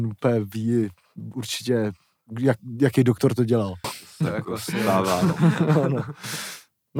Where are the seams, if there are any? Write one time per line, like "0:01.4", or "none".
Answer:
0:03.8